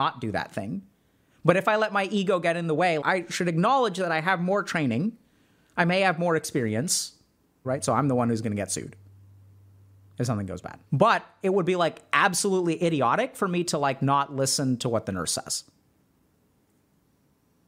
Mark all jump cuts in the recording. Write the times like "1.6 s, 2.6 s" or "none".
3.0 s, 7.6 s, 10.9 s